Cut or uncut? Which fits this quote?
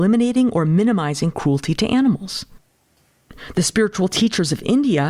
uncut